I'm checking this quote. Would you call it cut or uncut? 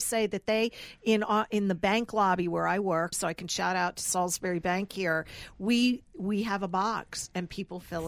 cut